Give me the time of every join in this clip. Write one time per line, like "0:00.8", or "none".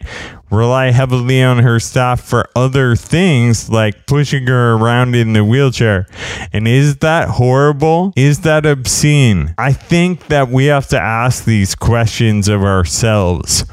none